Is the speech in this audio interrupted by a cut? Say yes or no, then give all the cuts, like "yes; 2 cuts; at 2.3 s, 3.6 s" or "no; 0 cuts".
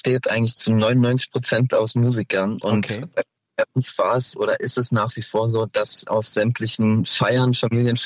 no; 0 cuts